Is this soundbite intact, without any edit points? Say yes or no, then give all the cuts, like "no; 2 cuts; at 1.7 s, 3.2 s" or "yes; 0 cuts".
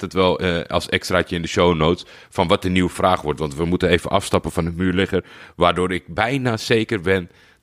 yes; 0 cuts